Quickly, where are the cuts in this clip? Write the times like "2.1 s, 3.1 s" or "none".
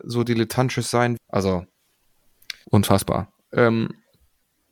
1.2 s, 2.6 s